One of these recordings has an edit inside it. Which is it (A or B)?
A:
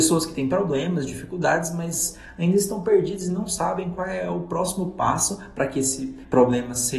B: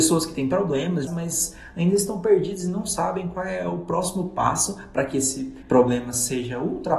B